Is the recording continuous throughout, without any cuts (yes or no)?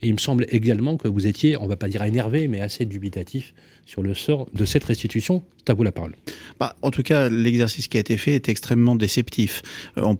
yes